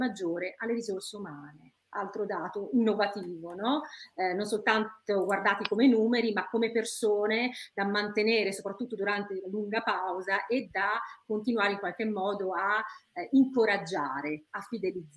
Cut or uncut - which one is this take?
uncut